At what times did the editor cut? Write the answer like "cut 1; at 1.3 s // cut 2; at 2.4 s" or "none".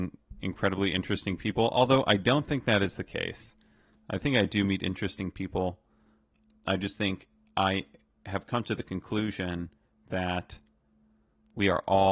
none